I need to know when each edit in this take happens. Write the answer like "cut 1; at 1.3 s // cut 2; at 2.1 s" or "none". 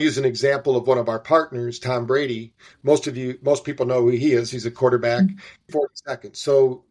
cut 1; at 5.7 s